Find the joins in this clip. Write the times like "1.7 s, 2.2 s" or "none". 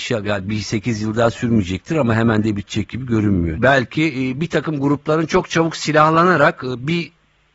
3.6 s